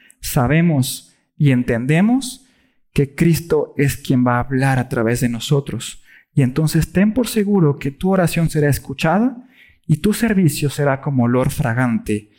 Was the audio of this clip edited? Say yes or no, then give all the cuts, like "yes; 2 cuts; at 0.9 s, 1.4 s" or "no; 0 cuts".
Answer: no; 0 cuts